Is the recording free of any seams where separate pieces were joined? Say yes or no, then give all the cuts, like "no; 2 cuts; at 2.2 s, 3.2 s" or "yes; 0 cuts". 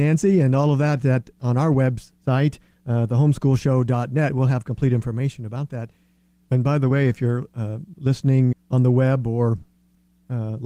no; 2 cuts; at 6.5 s, 8.5 s